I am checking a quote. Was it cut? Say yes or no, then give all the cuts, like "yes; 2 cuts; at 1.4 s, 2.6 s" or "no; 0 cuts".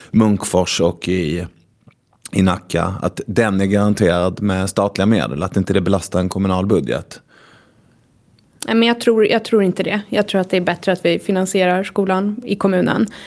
no; 0 cuts